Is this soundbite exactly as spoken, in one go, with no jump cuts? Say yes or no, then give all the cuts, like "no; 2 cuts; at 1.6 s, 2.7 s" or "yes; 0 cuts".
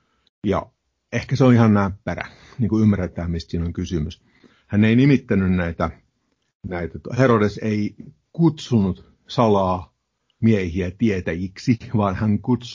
yes; 0 cuts